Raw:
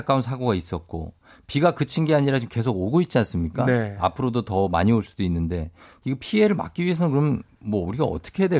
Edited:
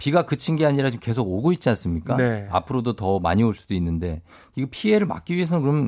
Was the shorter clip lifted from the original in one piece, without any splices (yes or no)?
yes